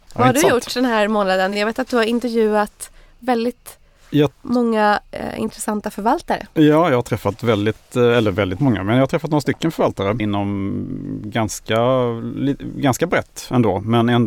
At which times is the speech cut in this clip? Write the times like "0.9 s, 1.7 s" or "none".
none